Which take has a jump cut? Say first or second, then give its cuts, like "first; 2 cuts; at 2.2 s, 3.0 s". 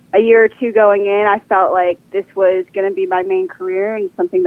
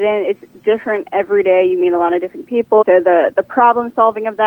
second; 1 cut; at 2.8 s